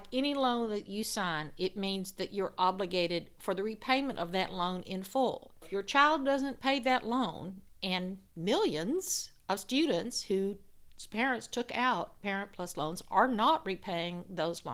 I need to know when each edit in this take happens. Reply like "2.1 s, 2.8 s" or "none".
8.3 s